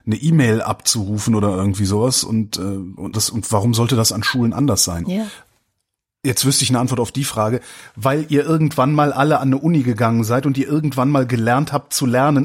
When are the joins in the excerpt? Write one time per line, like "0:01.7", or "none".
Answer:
0:03.1